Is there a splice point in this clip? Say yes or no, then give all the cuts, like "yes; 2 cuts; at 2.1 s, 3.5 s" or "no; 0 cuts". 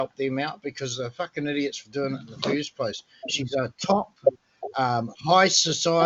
yes; 1 cut; at 3.2 s